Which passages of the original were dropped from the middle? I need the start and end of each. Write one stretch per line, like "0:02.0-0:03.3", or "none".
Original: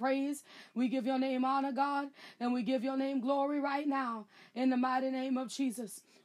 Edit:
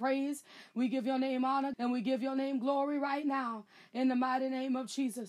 0:01.7-0:02.3